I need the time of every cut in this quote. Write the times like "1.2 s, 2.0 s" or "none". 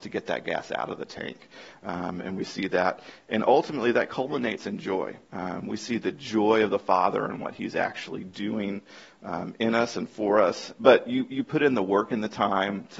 5.2 s, 10.8 s